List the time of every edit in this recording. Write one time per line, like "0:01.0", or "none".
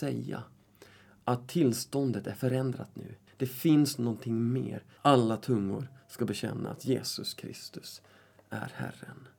0:03.3
0:05.0